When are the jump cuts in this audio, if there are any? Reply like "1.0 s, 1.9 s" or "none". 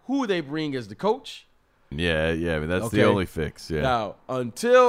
1.9 s